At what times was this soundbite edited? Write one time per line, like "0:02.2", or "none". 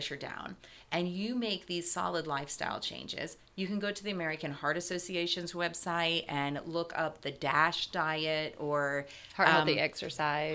none